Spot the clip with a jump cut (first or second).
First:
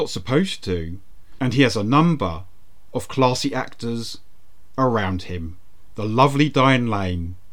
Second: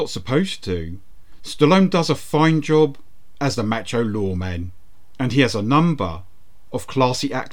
first